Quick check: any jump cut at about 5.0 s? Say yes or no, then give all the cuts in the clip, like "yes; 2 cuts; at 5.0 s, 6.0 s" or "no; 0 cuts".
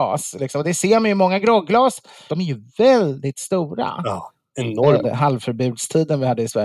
yes; 2 cuts; at 2.3 s, 5.0 s